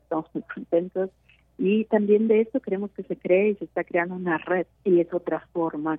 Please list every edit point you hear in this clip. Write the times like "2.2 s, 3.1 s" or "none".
4.8 s